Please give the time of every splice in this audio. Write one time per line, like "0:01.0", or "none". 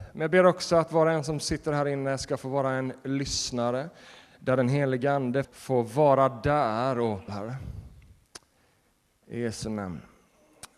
0:05.4
0:07.3